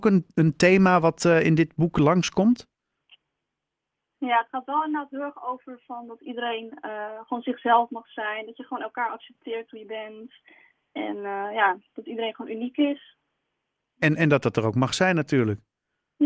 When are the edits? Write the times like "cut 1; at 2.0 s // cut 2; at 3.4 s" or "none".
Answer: none